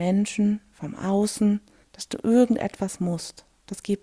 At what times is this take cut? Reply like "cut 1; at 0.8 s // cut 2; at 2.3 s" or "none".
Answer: cut 1; at 1.8 s